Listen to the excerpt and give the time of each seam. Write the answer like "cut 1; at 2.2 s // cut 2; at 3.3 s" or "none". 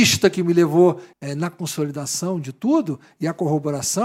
cut 1; at 1.1 s